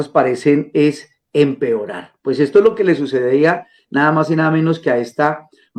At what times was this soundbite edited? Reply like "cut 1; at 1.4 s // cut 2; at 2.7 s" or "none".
none

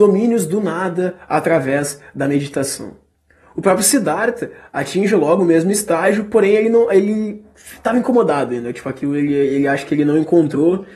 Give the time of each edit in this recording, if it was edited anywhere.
none

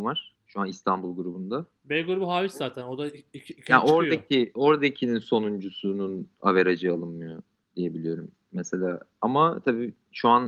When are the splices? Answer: none

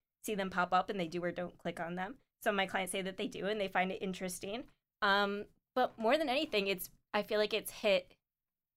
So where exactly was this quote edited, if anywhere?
none

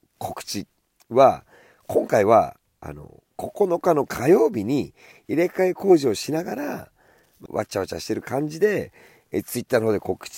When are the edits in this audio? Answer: cut 1; at 7.5 s

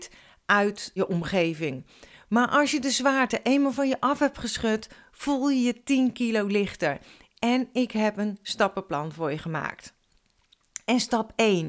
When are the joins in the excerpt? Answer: cut 1; at 1.0 s

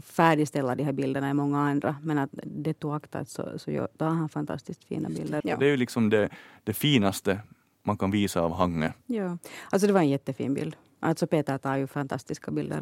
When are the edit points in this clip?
cut 1; at 5.4 s

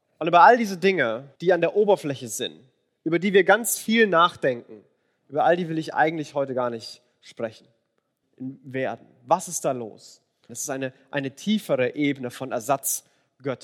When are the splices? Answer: cut 1; at 1.4 s // cut 2; at 8.2 s // cut 3; at 10.5 s

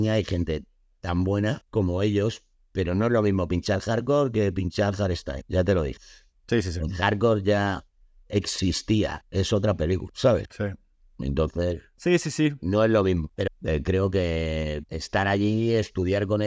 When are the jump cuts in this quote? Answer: cut 1; at 13.5 s

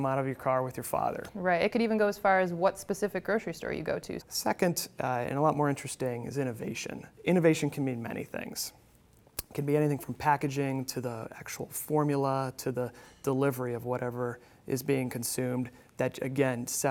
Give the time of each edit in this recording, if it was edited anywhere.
cut 1; at 4.2 s // cut 2; at 7.1 s

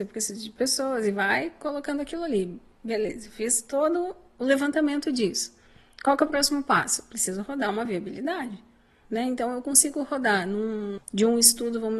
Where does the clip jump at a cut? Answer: cut 1; at 9.1 s // cut 2; at 11.0 s

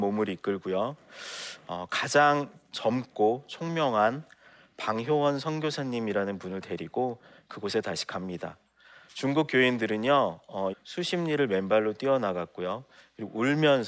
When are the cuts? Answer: cut 1; at 10.7 s

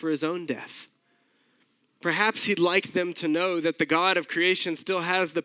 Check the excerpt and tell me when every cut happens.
none

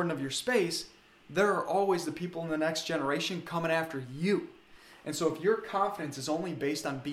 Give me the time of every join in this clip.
none

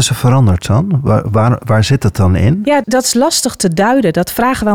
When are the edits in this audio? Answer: cut 1; at 2.8 s

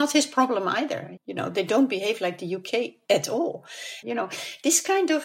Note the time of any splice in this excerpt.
cut 1; at 1.2 s // cut 2; at 4.0 s

